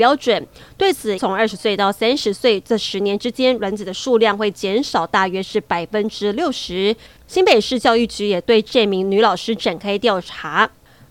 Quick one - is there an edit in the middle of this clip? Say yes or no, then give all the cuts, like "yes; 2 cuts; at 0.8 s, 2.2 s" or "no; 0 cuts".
yes; 2 cuts; at 1.2 s, 7.2 s